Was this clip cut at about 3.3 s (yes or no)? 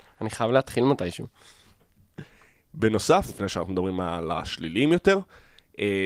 yes